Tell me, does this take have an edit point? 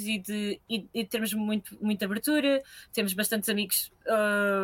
no; 0 cuts

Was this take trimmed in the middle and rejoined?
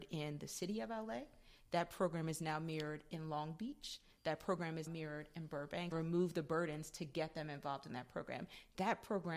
yes; 2 cuts; at 4.9 s, 5.9 s

